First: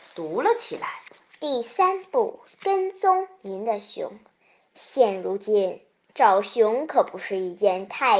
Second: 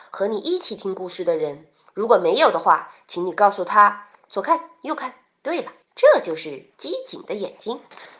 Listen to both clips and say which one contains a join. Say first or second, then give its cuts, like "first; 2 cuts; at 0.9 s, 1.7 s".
second; 2 cuts; at 4.3 s, 5.8 s